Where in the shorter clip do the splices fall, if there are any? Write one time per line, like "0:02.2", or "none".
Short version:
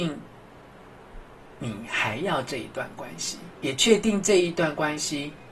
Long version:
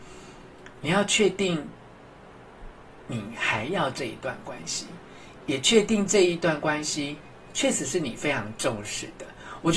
0:03.5